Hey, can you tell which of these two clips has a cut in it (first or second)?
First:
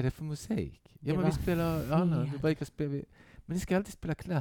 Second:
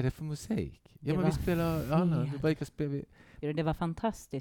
second